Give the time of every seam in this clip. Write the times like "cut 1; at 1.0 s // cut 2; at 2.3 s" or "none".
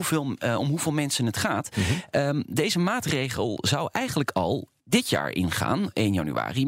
cut 1; at 4.8 s